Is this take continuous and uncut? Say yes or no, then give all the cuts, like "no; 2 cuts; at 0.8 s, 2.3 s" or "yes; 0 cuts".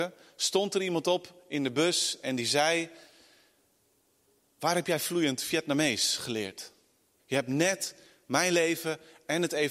no; 1 cut; at 7.2 s